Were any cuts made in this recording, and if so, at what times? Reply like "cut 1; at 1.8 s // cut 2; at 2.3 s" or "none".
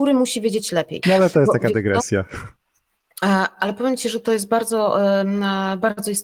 cut 1; at 1.0 s